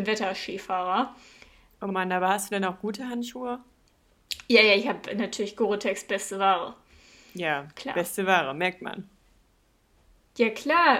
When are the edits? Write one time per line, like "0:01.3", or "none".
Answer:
none